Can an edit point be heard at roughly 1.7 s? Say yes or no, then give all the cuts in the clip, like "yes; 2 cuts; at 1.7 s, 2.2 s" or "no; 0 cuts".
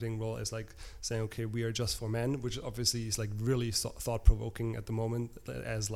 no; 0 cuts